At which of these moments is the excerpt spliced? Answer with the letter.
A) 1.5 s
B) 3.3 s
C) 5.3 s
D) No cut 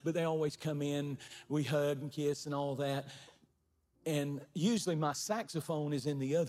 D